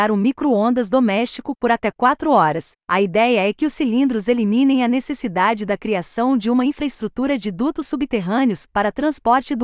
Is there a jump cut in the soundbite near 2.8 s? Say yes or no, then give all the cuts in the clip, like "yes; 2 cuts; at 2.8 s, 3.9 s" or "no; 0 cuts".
yes; 1 cut; at 2.8 s